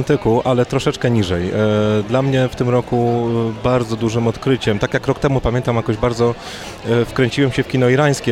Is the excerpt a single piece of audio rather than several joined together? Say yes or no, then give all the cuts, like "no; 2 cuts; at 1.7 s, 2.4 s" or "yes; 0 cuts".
yes; 0 cuts